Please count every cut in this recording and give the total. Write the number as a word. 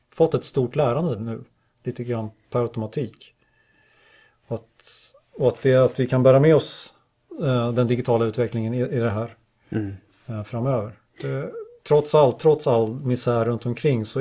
zero